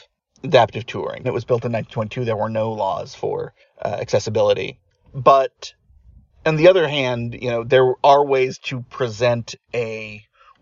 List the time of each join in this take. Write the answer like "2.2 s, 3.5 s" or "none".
1.2 s